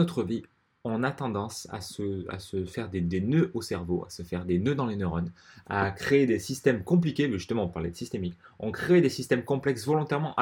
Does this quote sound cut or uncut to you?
uncut